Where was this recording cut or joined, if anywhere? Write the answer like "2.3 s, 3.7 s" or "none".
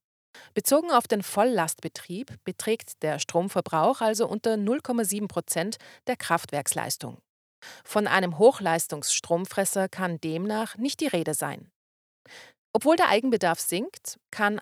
none